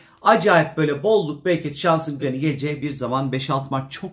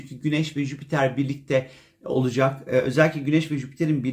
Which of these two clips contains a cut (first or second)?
first